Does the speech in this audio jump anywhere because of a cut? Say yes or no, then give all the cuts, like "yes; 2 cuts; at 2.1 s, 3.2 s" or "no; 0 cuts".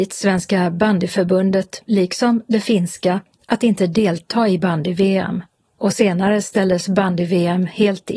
no; 0 cuts